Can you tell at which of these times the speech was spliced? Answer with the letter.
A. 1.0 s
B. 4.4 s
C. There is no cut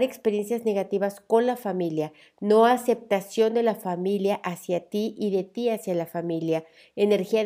C